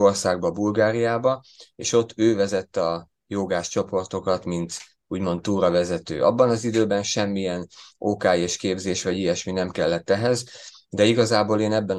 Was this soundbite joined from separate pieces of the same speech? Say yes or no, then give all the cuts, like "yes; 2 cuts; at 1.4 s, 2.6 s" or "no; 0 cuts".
no; 0 cuts